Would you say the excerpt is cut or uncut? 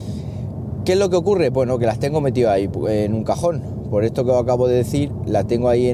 uncut